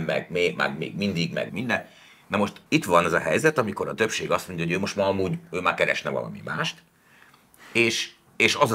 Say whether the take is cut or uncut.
cut